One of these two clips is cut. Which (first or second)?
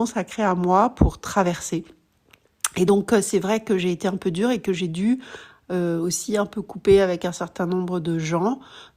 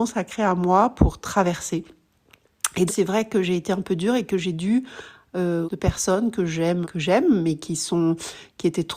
second